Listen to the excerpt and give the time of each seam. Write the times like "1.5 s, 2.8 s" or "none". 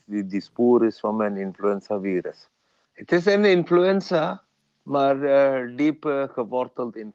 2.8 s